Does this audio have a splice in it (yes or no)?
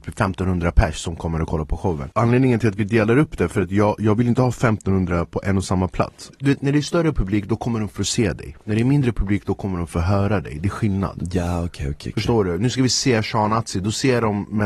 no